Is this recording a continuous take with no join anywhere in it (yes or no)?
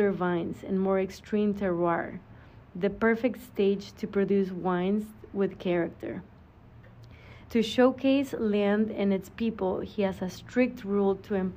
no